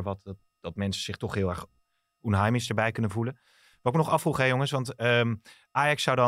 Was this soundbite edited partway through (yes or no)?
no